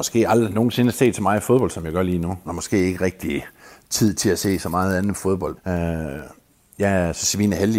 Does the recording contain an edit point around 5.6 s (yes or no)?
yes